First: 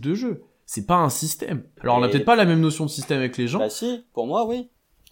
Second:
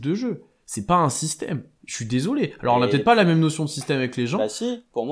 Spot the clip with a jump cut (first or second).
first